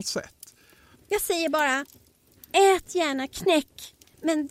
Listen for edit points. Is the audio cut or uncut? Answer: cut